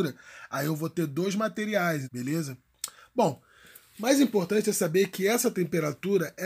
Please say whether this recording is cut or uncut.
cut